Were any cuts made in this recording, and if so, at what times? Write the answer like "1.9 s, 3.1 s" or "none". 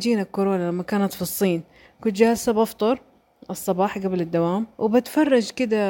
4.7 s